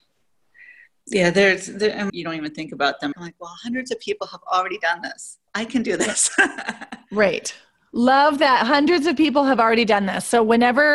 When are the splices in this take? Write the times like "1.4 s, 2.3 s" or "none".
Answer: 2.1 s, 3.1 s, 5.5 s